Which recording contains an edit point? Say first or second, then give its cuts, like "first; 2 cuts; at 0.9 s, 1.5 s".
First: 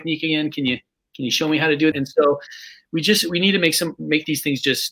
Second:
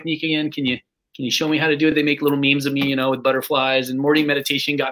first; 1 cut; at 1.9 s